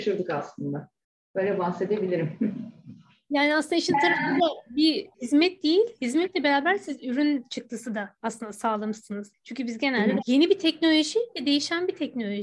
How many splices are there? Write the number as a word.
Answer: one